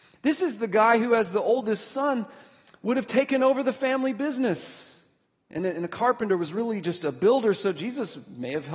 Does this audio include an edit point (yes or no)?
no